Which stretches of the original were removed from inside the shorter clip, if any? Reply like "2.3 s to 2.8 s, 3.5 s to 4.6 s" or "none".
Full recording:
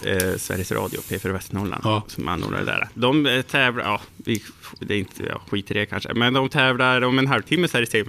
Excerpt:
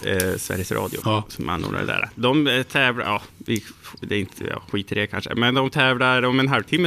1.0 s to 1.8 s